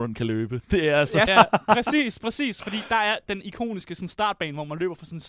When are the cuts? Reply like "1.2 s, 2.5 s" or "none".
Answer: 1.3 s